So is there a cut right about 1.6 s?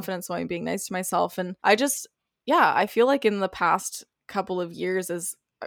yes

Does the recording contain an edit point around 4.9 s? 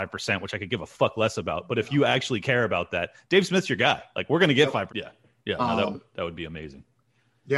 yes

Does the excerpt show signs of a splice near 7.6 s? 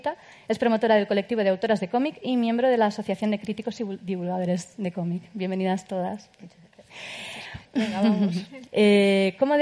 yes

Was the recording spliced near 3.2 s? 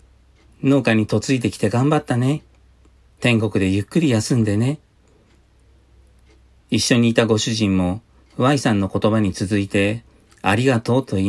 yes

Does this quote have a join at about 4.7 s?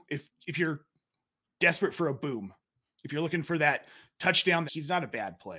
yes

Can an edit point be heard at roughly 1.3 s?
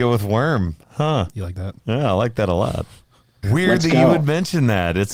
no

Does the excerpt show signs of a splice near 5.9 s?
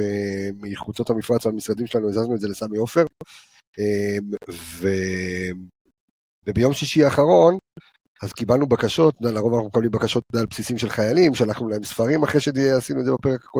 no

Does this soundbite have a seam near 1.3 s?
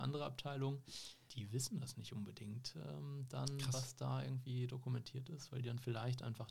yes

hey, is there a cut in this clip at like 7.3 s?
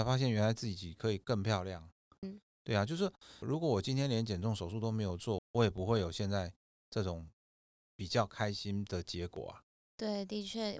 no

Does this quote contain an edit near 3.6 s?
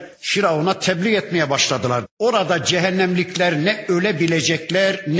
no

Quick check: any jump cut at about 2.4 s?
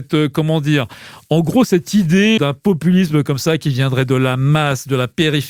yes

